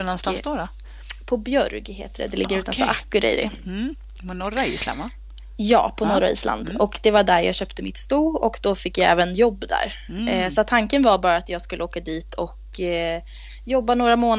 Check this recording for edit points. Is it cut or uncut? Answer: uncut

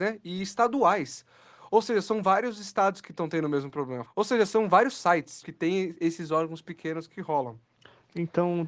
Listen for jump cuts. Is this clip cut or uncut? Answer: cut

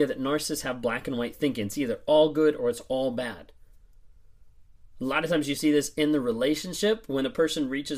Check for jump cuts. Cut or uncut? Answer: uncut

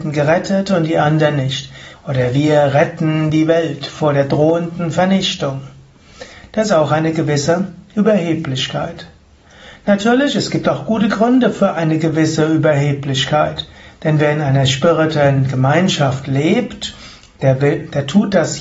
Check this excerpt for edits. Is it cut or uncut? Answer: cut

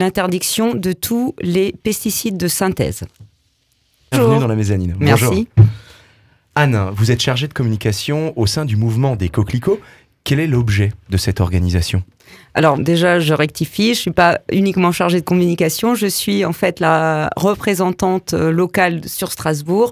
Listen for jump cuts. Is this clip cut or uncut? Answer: cut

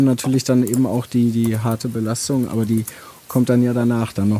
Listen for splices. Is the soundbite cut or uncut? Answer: uncut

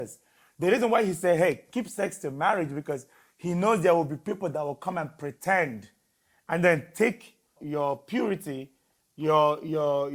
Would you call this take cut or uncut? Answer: cut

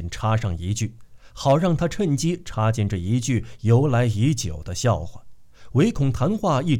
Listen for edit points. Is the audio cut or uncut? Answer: cut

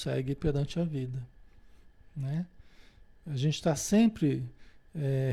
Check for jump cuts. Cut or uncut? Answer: uncut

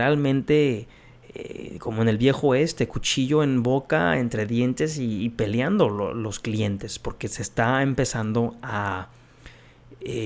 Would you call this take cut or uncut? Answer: uncut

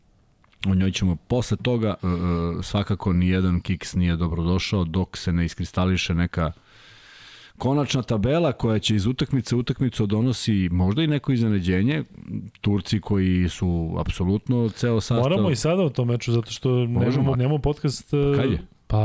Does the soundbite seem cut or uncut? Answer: cut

